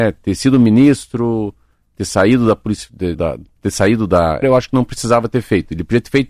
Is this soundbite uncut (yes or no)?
no